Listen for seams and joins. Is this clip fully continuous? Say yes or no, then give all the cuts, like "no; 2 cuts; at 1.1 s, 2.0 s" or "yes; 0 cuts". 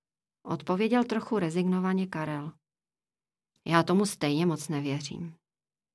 yes; 0 cuts